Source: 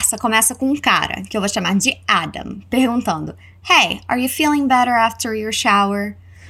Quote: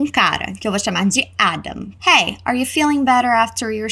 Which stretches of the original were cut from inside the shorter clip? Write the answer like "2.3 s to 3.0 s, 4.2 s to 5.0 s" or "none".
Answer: 2.7 s to 3.6 s